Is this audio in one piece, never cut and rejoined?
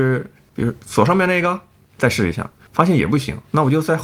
yes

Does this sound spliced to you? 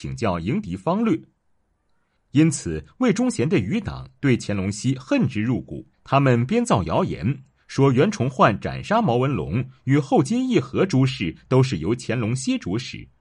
yes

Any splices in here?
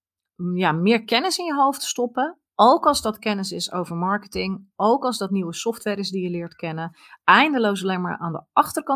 no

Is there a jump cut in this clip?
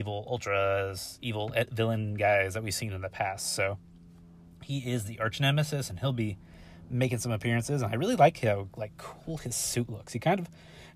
no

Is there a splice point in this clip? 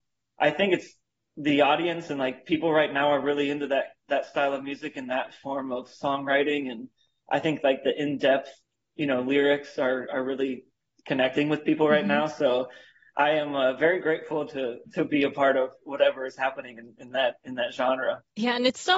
no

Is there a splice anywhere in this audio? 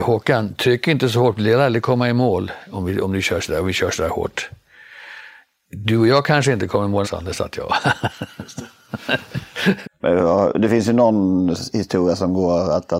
yes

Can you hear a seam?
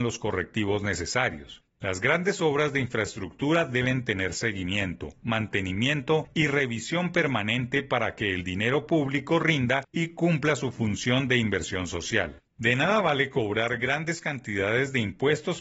no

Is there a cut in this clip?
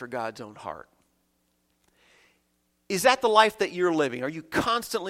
no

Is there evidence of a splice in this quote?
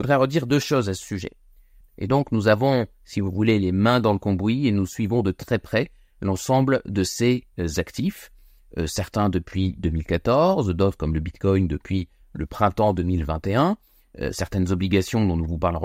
yes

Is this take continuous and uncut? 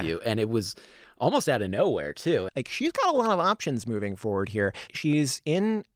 no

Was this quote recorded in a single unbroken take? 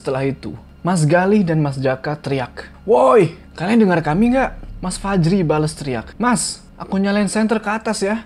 yes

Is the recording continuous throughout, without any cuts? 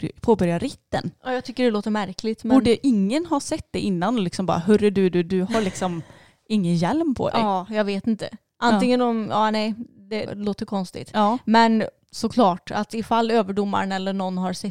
no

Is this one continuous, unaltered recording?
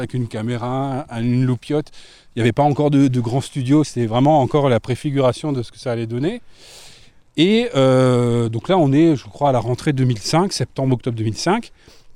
yes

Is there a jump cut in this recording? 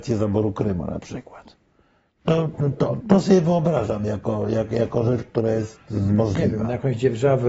yes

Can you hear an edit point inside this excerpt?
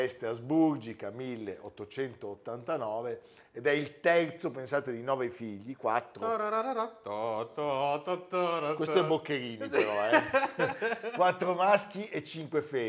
no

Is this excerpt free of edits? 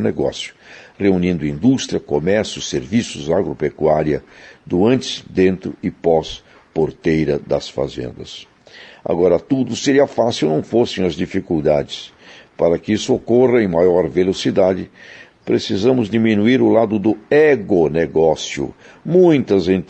yes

